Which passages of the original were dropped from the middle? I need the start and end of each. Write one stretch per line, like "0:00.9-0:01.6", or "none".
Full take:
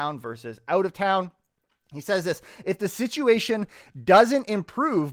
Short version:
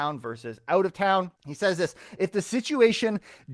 0:01.4-0:01.8

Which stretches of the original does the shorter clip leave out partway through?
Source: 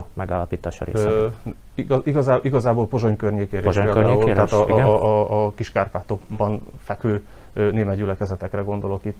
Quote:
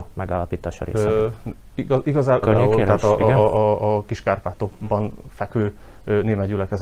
0:02.4-0:03.9

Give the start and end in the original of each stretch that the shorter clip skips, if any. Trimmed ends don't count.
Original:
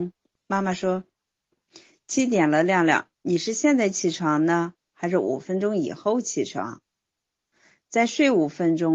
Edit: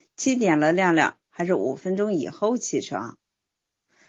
0:03.1-0:04.9

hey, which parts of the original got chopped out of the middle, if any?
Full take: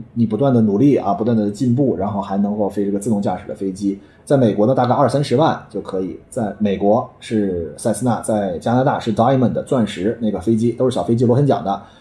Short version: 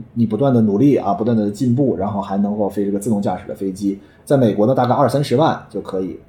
none

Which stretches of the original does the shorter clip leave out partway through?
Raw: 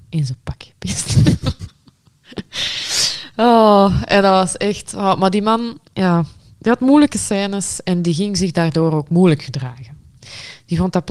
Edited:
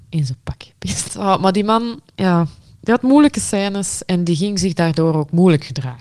0:01.1-0:04.9

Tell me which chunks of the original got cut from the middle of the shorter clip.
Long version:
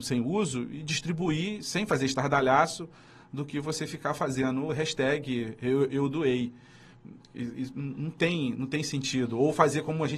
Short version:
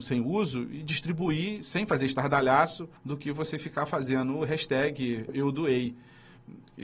0:03.0-0:03.2
0:05.6-0:05.9

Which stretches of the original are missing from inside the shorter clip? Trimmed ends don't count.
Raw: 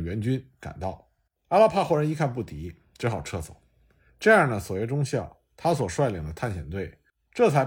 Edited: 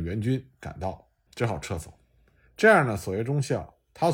0:01.3-0:02.9

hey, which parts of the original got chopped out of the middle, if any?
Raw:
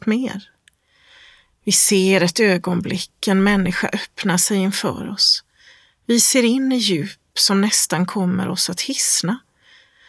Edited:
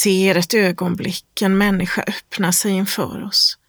none

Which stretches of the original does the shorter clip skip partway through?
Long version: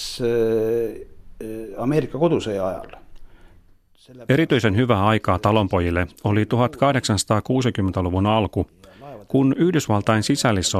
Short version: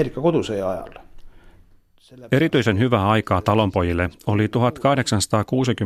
none

